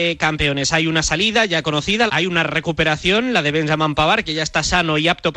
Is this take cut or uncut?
cut